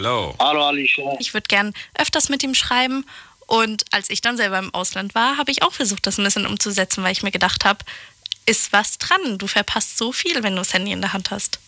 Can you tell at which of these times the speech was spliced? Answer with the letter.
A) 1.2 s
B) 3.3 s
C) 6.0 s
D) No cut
A